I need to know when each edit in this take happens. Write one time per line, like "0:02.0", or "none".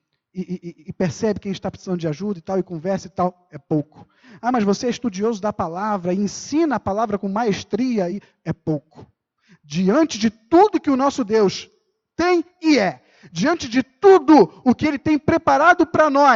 0:08.1